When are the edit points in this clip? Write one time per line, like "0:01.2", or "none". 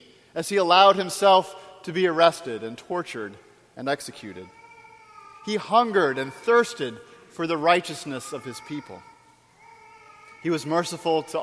none

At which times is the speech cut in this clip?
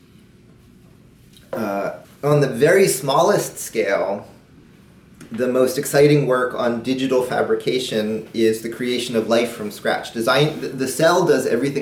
0:02.0

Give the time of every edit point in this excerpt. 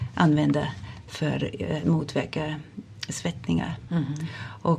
none

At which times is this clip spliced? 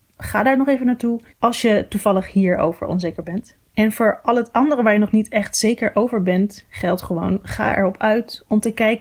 none

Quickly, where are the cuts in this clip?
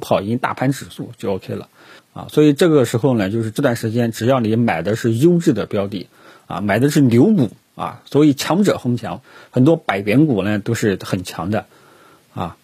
0:02.0

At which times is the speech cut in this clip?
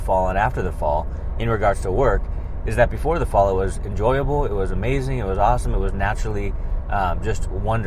none

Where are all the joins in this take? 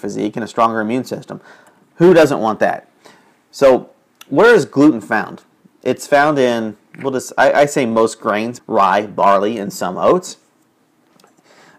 0:08.6

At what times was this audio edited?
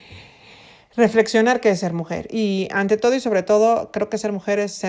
none

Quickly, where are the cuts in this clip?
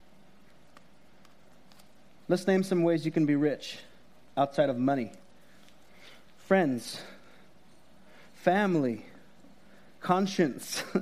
none

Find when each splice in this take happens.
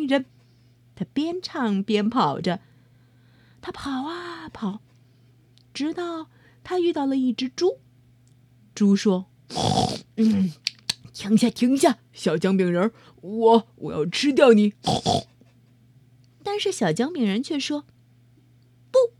none

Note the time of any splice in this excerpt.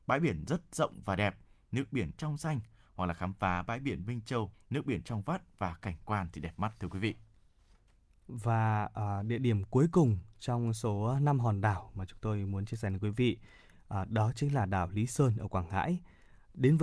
0:04.5

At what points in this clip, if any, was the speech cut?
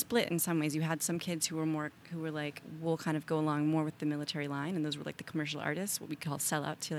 0:02.6

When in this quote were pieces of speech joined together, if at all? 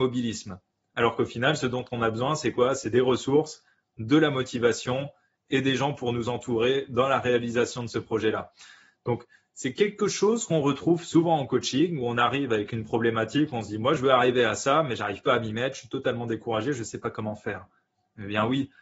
none

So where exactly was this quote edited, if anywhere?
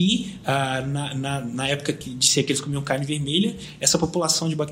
none

